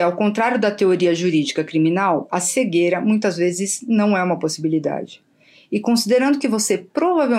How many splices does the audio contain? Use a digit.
0